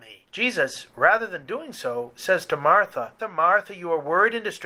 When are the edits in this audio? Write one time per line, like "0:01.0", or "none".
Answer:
0:03.2